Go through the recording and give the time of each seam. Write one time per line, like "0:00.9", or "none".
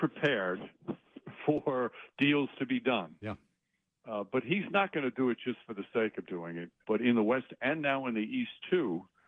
0:06.8